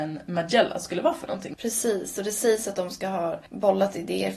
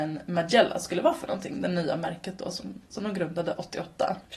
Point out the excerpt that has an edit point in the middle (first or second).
first